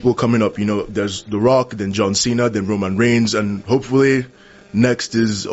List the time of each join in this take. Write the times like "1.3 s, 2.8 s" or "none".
none